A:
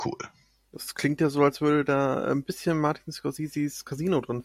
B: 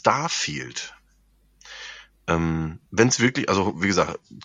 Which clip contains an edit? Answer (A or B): B